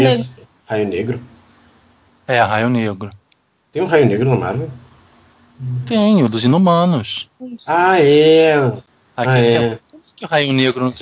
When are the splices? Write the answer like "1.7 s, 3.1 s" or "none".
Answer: none